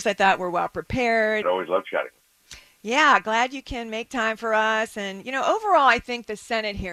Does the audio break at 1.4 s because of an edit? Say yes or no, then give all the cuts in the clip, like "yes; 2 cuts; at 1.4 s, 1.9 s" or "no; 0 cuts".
yes; 1 cut; at 1.4 s